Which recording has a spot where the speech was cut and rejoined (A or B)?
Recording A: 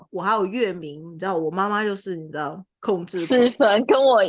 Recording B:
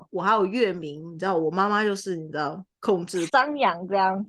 B